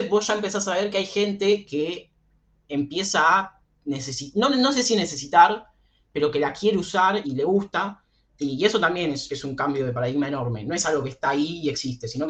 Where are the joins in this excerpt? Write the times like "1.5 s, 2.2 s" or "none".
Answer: 7.2 s